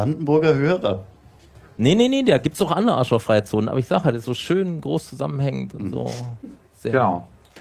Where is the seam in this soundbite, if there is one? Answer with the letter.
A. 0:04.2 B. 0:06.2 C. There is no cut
A